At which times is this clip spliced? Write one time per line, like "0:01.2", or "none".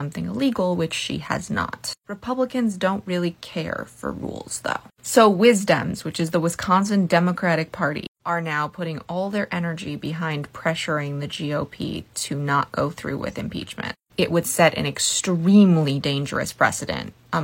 none